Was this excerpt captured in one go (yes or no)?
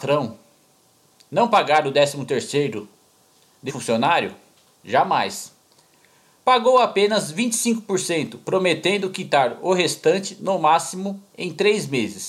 no